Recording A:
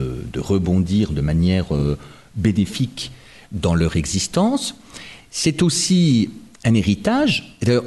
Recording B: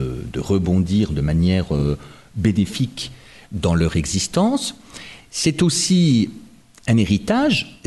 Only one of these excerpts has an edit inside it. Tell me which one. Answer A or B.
A